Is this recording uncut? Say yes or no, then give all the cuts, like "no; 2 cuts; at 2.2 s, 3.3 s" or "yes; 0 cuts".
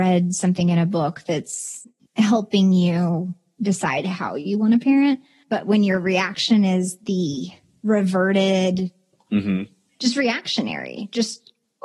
yes; 0 cuts